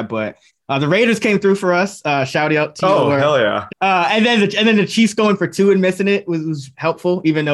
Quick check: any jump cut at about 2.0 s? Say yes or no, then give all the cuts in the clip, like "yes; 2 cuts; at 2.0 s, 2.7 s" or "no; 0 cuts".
no; 2 cuts; at 3.7 s, 6.3 s